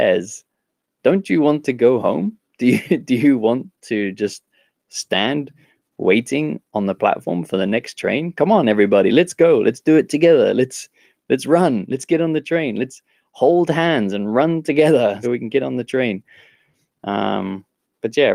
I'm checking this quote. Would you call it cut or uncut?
cut